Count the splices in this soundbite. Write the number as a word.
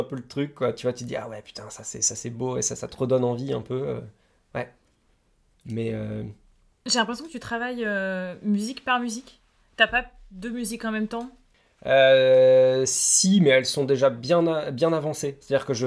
zero